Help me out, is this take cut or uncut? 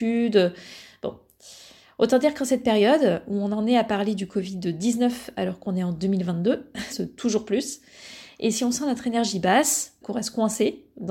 cut